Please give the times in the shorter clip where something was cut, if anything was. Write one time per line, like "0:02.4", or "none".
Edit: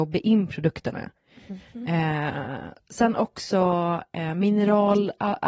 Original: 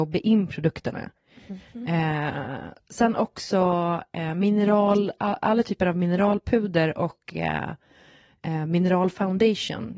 none